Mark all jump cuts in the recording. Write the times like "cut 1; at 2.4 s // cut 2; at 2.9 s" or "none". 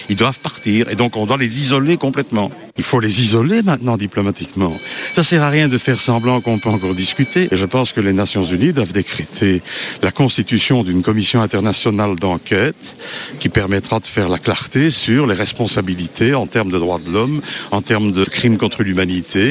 cut 1; at 2.8 s // cut 2; at 7.5 s